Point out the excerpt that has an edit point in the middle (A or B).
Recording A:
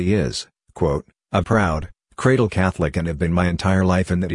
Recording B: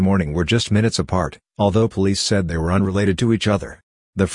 A